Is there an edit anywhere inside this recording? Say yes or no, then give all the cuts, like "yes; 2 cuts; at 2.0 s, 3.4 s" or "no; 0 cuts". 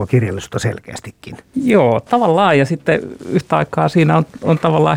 yes; 1 cut; at 1.5 s